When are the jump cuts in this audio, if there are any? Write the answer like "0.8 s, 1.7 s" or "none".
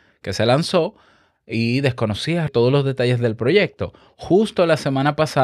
2.5 s